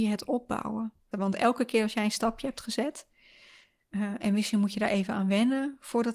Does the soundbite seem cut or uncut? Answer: cut